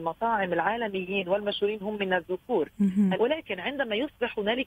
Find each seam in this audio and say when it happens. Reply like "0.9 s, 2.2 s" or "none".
3.1 s

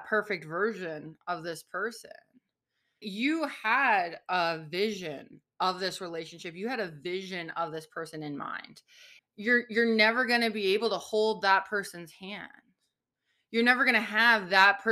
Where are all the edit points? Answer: 3.0 s, 9.2 s

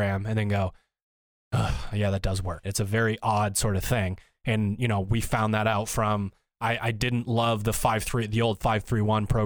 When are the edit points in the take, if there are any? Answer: 2.6 s

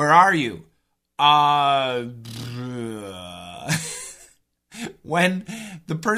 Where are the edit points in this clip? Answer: none

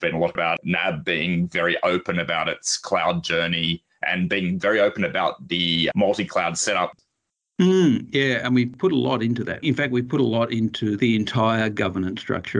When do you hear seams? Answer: none

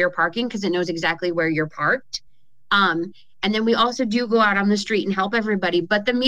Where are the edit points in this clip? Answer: none

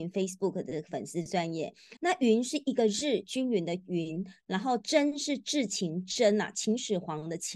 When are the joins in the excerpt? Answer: 2.0 s

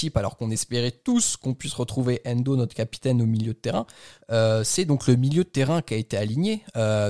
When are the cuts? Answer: 4.2 s

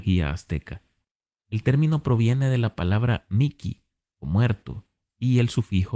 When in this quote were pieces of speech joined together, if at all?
none

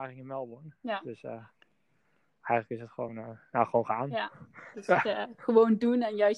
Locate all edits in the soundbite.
none

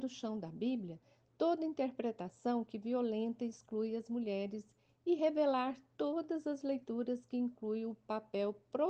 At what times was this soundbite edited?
none

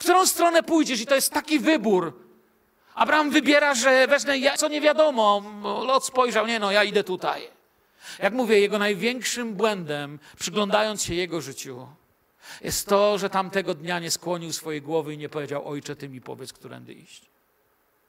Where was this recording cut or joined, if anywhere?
4.6 s

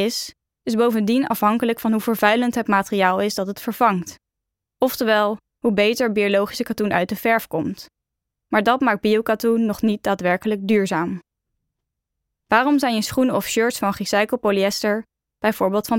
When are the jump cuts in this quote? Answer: 5.5 s, 12.4 s

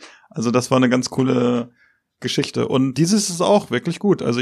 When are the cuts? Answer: 2.9 s

